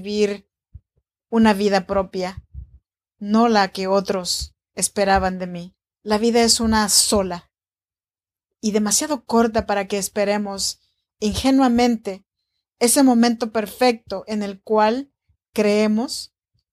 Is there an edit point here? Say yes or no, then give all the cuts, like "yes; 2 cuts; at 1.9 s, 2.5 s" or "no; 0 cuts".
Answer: no; 0 cuts